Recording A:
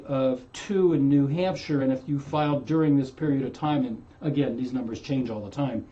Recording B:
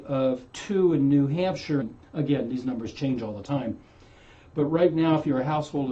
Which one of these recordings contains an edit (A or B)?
B